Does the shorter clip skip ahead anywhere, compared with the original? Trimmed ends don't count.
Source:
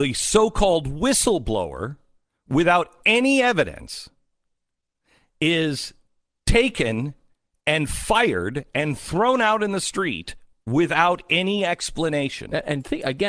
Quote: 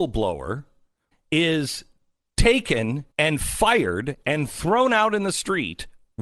yes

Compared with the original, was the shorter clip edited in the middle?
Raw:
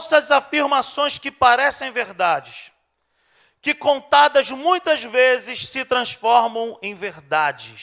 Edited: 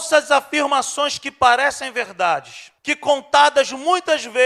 yes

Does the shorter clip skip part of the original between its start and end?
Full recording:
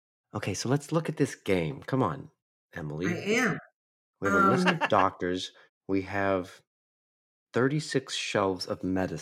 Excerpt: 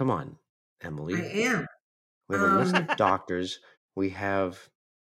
no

